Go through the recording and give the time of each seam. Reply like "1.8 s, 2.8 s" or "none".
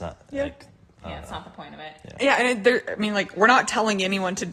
none